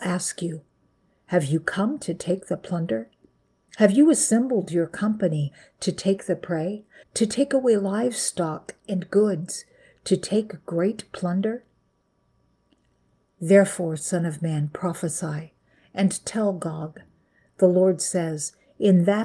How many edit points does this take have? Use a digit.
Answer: 1